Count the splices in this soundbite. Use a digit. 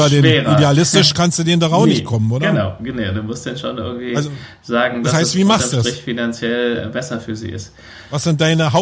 0